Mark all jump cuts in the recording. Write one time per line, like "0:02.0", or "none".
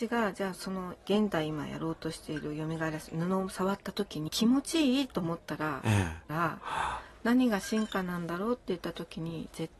0:04.3
0:06.3